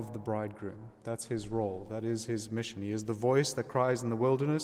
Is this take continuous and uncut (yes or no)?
yes